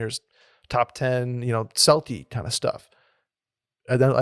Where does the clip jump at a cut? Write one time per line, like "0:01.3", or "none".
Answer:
none